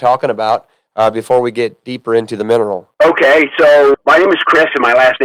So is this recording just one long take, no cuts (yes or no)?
no